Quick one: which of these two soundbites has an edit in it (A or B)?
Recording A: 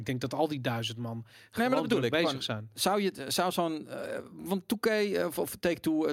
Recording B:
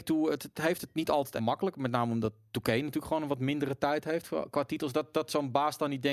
B